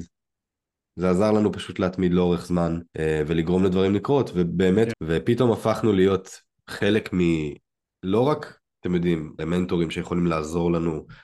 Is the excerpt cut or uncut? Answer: cut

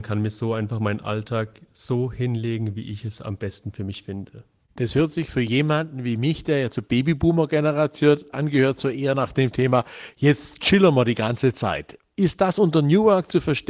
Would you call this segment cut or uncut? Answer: uncut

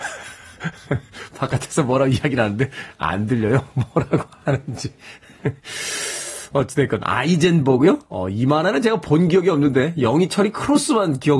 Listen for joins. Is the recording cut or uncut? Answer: uncut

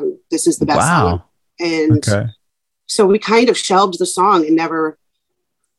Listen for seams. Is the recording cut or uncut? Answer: cut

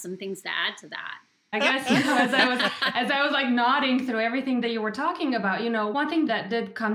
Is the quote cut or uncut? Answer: cut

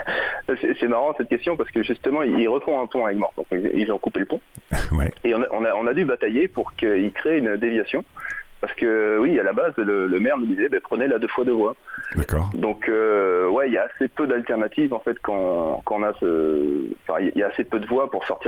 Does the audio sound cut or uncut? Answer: uncut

